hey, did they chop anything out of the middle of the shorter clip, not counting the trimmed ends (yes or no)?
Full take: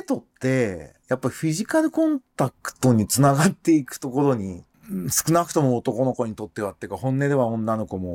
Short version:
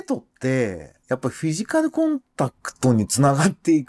no